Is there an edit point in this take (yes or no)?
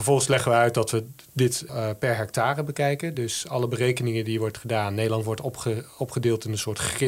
no